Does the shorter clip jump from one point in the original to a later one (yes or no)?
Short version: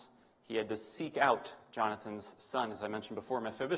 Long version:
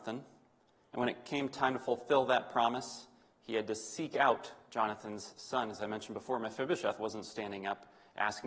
no